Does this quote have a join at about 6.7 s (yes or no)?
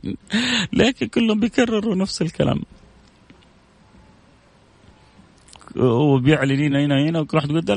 no